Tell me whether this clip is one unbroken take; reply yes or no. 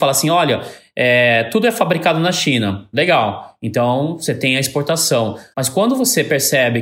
no